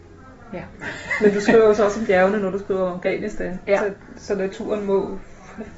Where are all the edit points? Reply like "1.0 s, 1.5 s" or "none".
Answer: none

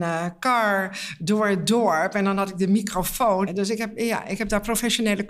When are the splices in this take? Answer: 3.5 s

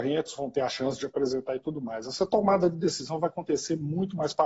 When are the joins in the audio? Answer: none

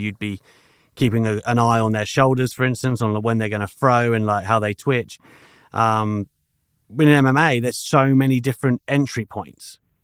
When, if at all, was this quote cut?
none

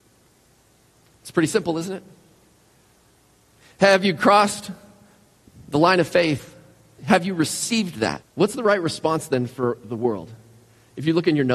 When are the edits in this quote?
7.0 s, 8.2 s

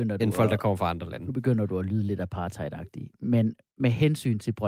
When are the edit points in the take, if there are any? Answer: none

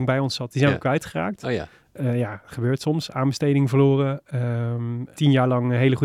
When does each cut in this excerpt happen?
5.1 s

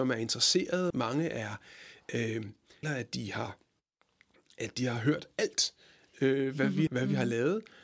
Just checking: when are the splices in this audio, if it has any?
0.9 s, 2.8 s, 6.9 s

